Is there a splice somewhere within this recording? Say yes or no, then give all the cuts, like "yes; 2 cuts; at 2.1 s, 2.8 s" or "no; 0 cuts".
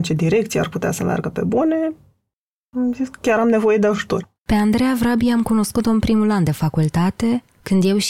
yes; 1 cut; at 4.4 s